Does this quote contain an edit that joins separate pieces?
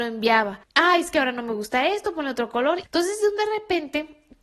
yes; 1 cut; at 2.8 s

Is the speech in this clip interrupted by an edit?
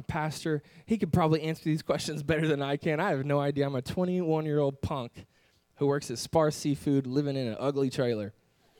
no; 0 cuts

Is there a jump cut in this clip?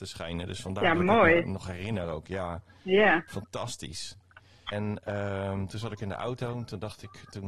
yes; 1 cut; at 4.7 s

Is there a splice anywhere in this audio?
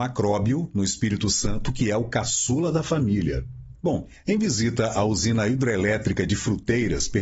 yes; 1 cut; at 3.8 s

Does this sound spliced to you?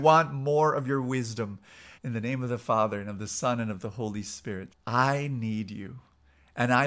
yes; 2 cuts; at 1.9 s, 4.7 s

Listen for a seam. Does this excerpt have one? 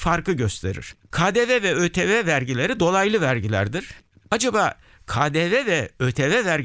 yes; 2 cuts; at 1.0 s, 4.2 s

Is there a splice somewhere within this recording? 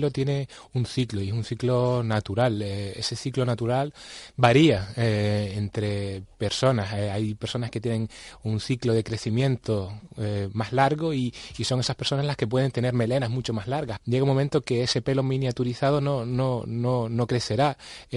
yes; 1 cut; at 14.0 s

